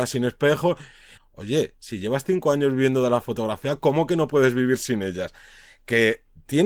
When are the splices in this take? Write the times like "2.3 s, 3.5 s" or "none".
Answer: 1.2 s